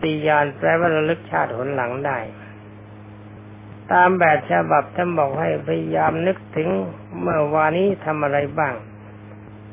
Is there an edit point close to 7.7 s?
yes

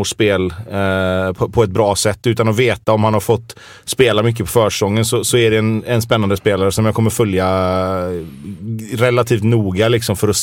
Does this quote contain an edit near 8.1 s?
no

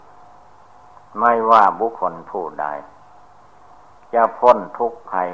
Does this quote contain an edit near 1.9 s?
yes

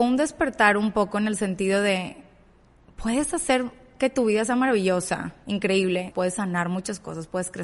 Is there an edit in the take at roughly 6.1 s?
yes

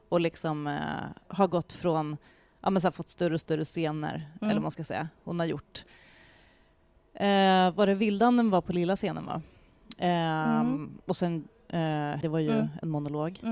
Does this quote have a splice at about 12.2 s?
yes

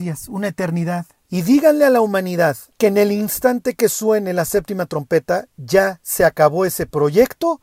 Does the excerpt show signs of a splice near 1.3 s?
yes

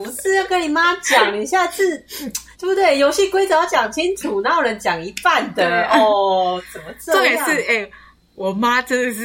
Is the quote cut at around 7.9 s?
no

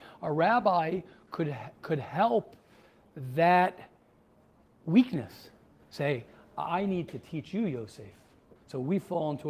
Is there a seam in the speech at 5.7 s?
no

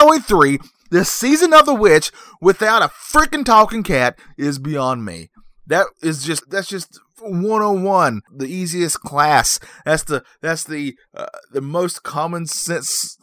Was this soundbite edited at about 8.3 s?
yes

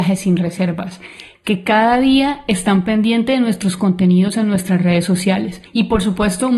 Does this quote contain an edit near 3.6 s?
no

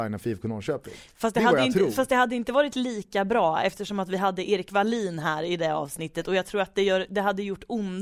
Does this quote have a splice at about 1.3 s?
no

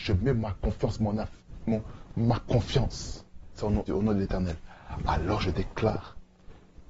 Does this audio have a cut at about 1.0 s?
no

